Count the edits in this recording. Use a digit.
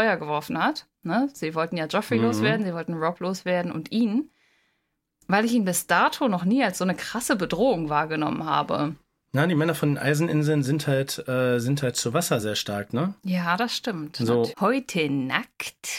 2